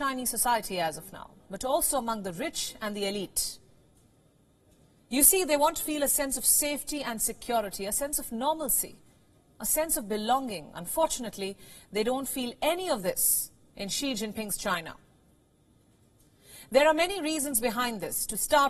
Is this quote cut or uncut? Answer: cut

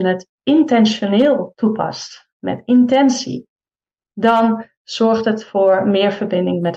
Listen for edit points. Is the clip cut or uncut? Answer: cut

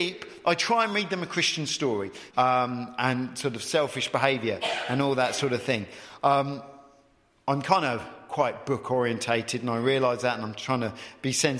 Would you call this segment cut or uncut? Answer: cut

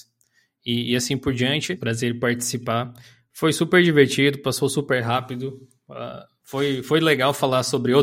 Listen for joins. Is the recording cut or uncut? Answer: cut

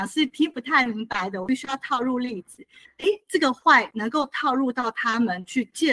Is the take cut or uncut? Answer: cut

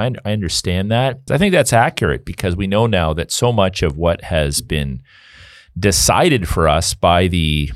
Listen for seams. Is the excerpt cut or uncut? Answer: cut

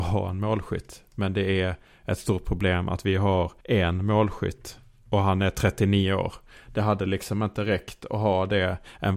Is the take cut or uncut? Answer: cut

